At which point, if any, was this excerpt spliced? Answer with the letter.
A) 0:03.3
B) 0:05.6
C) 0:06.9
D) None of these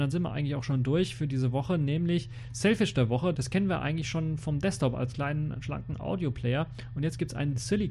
A